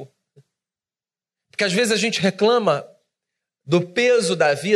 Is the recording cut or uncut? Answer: cut